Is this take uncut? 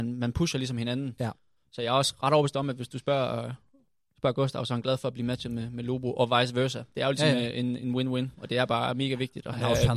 yes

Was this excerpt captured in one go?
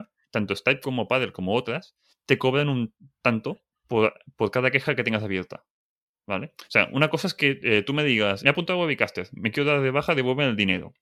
no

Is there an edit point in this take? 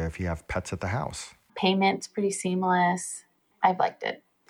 yes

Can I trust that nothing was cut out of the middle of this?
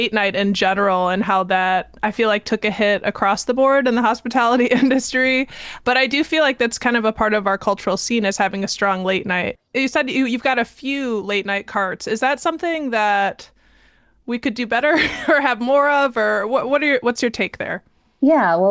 yes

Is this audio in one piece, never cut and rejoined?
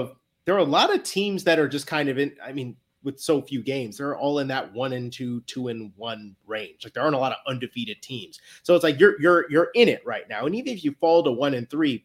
yes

